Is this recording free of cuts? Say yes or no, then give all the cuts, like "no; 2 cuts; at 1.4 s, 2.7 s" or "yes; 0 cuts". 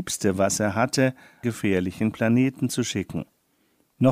no; 1 cut; at 1.4 s